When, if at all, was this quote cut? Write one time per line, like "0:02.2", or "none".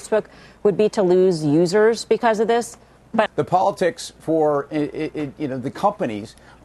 0:03.3